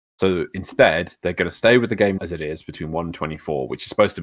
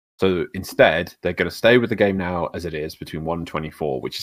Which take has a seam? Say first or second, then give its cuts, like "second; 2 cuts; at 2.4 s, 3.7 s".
first; 1 cut; at 2.2 s